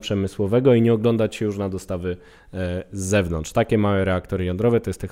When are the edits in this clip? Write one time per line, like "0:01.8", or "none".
none